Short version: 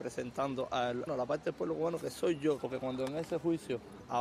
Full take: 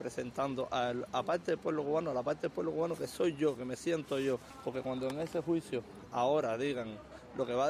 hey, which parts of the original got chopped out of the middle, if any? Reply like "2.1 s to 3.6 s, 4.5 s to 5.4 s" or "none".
1.1 s to 2.0 s, 3.6 s to 4.6 s